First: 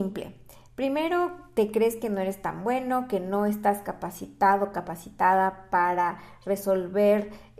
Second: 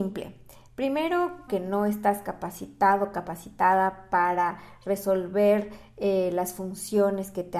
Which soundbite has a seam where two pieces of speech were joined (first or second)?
second